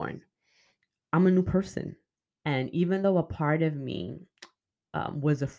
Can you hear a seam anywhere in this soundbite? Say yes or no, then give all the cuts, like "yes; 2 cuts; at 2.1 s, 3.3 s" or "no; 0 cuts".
yes; 1 cut; at 2.3 s